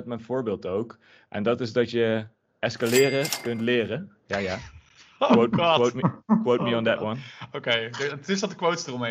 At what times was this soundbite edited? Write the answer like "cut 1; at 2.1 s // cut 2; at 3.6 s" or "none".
none